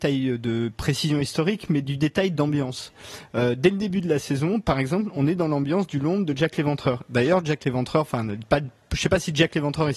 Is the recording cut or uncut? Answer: uncut